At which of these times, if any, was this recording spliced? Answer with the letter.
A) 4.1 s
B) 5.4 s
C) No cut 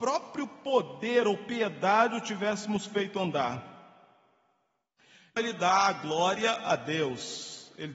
B